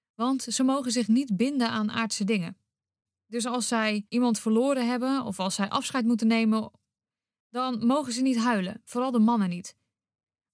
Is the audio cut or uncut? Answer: uncut